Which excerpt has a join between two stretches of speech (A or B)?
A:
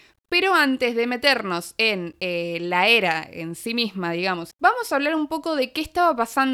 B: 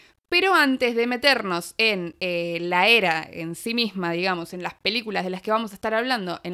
A